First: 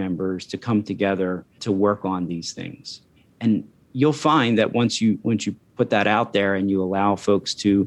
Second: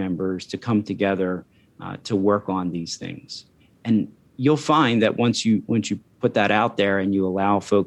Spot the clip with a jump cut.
first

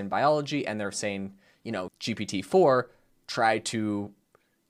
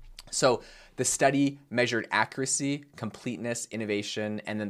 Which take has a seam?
first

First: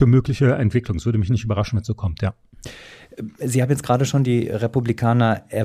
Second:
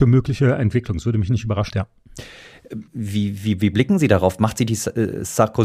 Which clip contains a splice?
second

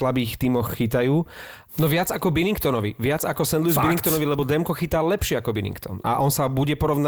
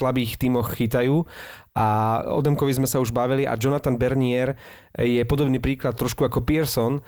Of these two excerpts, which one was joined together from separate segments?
first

